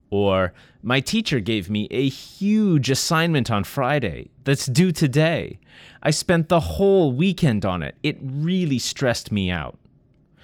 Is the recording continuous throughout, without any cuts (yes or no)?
yes